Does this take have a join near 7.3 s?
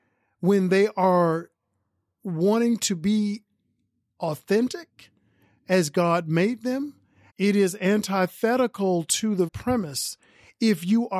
yes; 2 cuts; at 7.3 s, 9.5 s

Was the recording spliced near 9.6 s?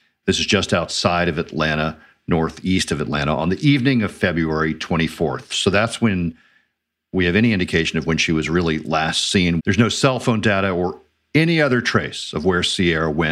yes; 1 cut; at 9.6 s

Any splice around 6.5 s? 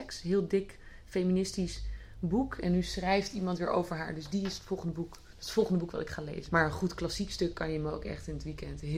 yes; 1 cut; at 6.5 s

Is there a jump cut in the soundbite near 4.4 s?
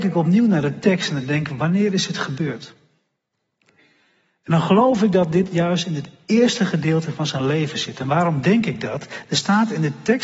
no; 0 cuts

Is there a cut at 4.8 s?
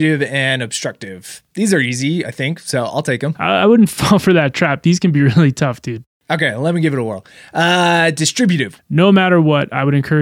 no; 1 cut; at 8.8 s

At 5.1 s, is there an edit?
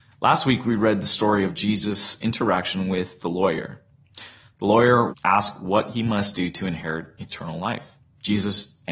yes; 1 cut; at 5.1 s

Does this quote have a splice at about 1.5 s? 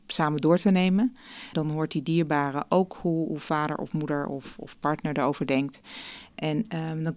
yes; 1 cut; at 1.5 s

